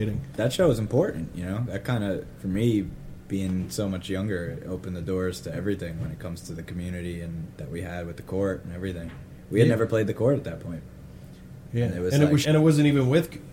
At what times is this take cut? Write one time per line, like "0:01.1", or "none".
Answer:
0:12.4